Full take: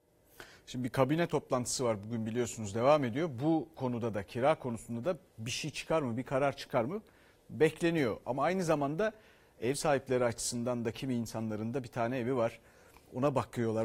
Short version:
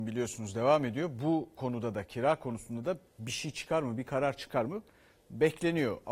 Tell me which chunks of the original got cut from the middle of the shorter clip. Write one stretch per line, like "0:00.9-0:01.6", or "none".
none